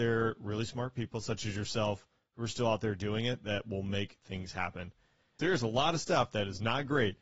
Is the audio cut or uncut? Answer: cut